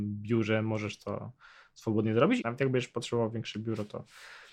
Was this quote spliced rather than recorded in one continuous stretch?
yes; 1 cut; at 2.4 s

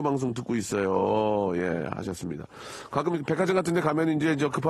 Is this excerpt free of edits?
yes; 0 cuts

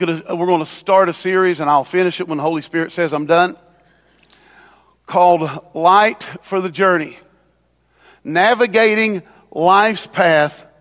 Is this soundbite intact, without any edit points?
yes; 0 cuts

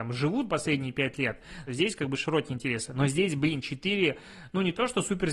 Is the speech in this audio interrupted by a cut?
yes; 1 cut; at 1.7 s

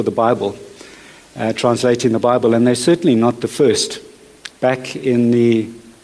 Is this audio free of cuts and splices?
yes; 0 cuts

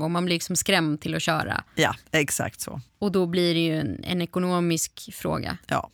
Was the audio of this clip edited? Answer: yes; 1 cut; at 2.0 s

